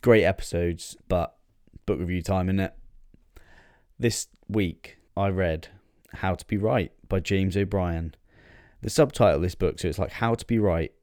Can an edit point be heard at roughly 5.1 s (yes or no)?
yes